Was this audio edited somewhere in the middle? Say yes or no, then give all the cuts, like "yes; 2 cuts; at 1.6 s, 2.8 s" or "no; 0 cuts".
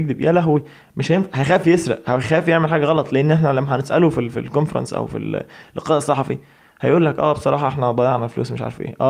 no; 0 cuts